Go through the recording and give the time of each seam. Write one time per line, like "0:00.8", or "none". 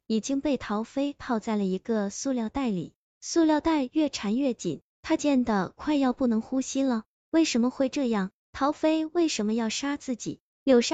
0:05.2